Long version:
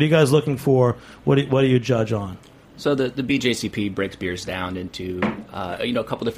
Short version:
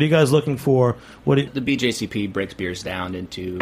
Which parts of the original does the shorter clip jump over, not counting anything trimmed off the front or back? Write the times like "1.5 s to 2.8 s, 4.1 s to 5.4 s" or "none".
1.5 s to 3.1 s